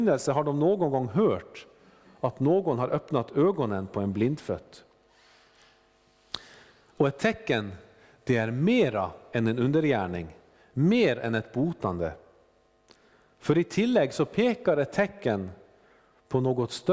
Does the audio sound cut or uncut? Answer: uncut